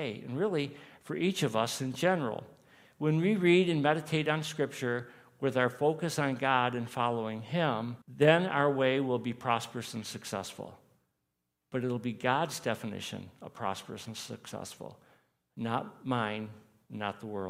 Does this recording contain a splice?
yes; 1 cut; at 8.0 s

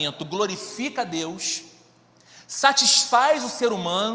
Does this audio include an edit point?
no; 0 cuts

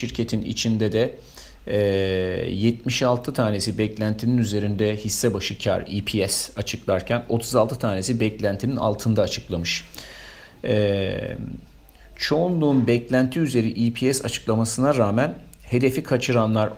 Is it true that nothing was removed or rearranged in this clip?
yes; 0 cuts

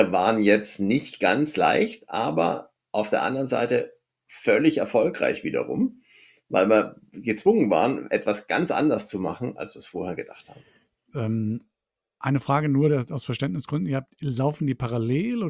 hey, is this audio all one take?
no; 1 cut; at 11.1 s

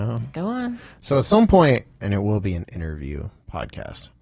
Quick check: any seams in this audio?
yes; 1 cut; at 2.0 s

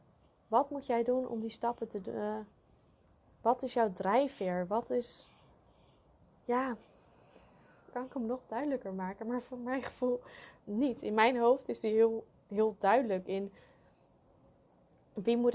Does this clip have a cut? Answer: yes; 2 cuts; at 7.9 s, 10.6 s

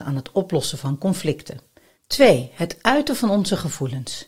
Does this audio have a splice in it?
yes; 1 cut; at 2.0 s

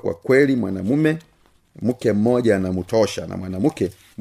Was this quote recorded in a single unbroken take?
yes; 0 cuts

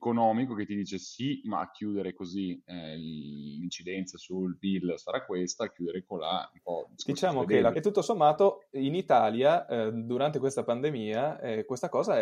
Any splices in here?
yes; 1 cut; at 7.7 s

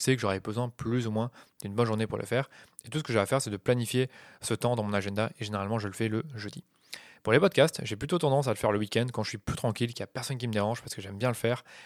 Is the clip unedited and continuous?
yes; 0 cuts

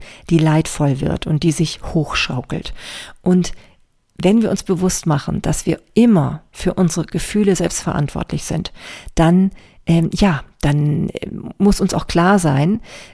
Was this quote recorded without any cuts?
yes; 0 cuts

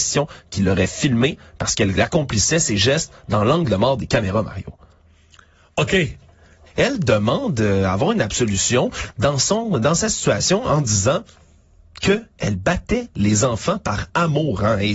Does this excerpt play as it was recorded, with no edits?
no; 1 cut; at 6.7 s

